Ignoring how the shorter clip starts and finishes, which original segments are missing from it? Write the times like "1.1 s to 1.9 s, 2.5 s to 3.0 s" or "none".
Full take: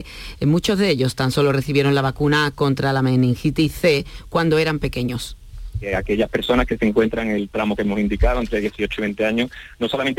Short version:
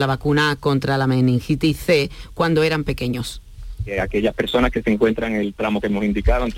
none

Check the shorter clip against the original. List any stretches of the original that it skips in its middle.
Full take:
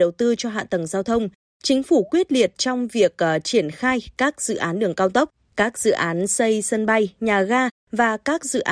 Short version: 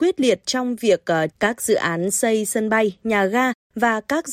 3.4 s to 5.5 s

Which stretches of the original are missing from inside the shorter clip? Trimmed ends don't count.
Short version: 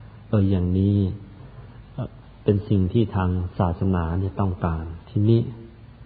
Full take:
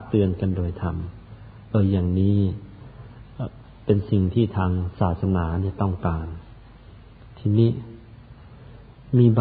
6.4 s to 7.3 s

